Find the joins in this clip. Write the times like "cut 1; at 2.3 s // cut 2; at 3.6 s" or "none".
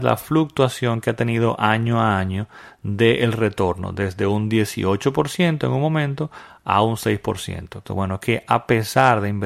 cut 1; at 7.9 s